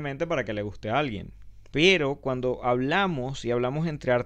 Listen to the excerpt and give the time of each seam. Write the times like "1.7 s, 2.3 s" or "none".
1.7 s